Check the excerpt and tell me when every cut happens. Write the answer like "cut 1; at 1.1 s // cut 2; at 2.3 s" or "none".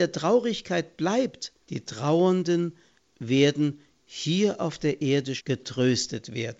cut 1; at 1.6 s // cut 2; at 5.4 s

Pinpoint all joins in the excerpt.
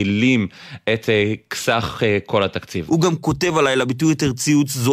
cut 1; at 2.9 s

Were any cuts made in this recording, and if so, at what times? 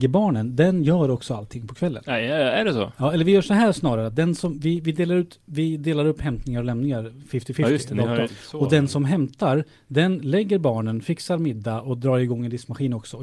cut 1; at 8.2 s

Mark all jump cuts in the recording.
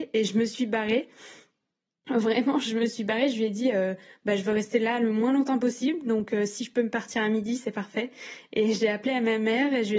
none

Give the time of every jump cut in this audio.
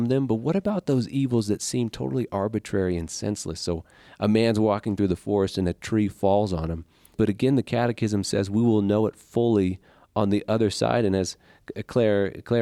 cut 1; at 7.1 s

